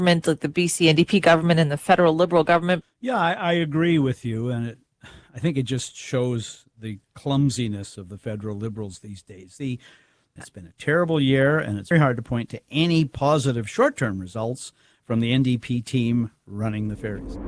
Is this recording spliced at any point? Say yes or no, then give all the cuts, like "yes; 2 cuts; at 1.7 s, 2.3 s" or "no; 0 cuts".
yes; 3 cuts; at 2.8 s, 10.4 s, 11.9 s